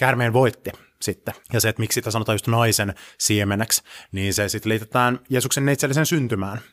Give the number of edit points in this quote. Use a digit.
1